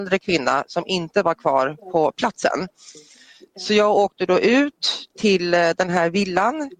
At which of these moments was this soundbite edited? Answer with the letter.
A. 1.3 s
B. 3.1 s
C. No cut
C